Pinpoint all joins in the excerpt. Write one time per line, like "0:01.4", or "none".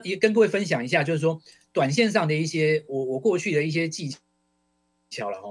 none

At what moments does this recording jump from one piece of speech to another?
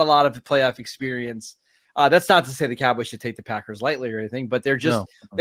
none

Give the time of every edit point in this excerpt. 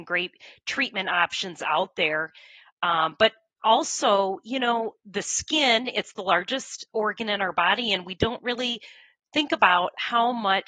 none

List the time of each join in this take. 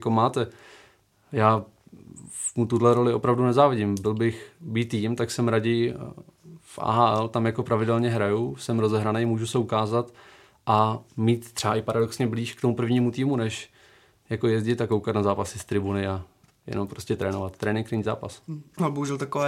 none

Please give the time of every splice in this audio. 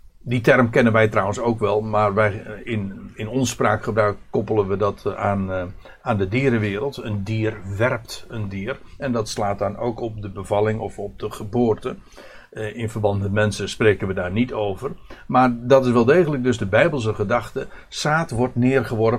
none

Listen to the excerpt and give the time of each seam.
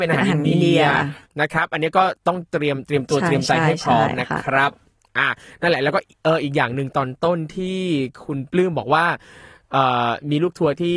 none

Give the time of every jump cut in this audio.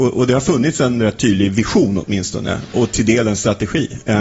0:02.7

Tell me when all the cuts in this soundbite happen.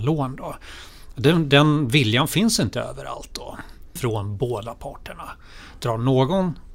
0:04.0

